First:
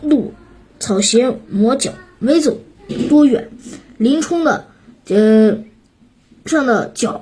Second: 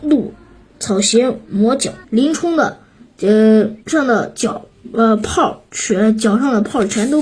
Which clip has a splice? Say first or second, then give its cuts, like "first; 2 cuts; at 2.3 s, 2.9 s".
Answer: second; 2 cuts; at 2.0 s, 3.8 s